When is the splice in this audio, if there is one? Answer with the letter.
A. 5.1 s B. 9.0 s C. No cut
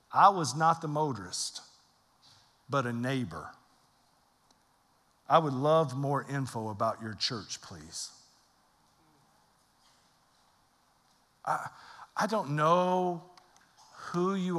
C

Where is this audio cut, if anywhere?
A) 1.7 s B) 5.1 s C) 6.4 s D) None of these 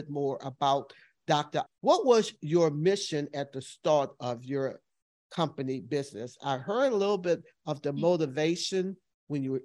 A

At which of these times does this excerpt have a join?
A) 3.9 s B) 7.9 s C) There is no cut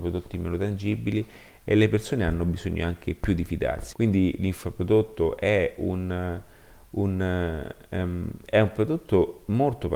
A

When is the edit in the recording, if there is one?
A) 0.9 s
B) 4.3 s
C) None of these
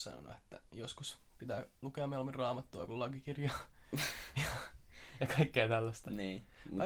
C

